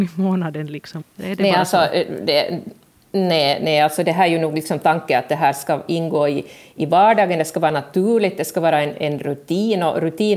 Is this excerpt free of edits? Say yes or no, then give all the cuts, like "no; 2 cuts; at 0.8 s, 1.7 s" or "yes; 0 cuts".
no; 1 cut; at 1.0 s